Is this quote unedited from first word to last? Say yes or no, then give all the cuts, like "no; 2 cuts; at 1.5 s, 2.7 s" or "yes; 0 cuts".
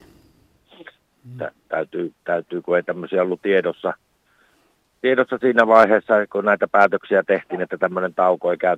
no; 1 cut; at 1.1 s